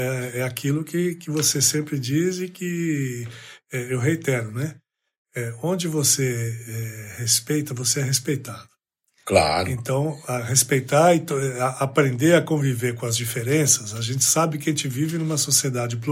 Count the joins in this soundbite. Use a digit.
0